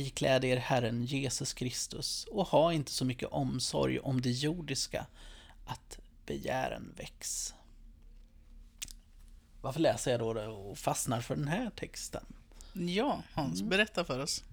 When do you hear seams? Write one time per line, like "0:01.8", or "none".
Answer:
none